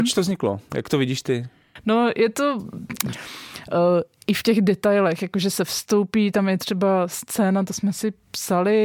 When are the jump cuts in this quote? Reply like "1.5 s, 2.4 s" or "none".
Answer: 3.1 s